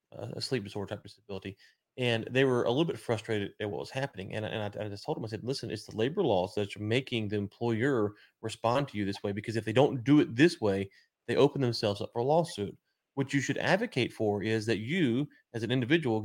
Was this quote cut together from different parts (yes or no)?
no